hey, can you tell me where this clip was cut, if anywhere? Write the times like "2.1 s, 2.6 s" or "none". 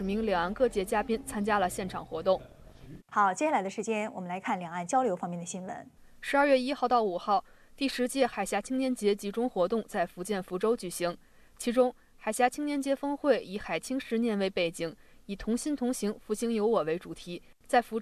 3.0 s